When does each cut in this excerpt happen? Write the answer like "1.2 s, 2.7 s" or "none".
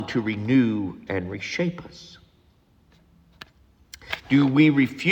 4.2 s